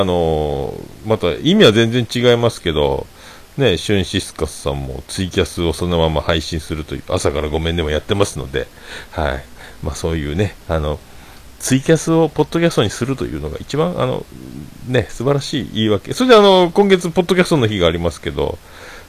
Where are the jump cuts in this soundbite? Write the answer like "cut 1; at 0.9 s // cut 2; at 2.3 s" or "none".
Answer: none